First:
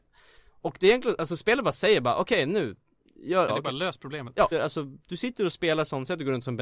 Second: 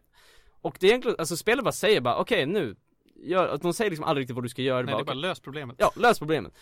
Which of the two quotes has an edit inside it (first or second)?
first